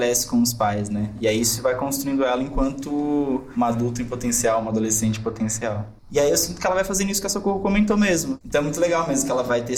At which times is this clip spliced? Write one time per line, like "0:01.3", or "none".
0:06.0
0:08.4